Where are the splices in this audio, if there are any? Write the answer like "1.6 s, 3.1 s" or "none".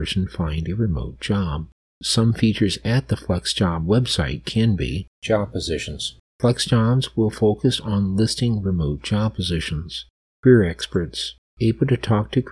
none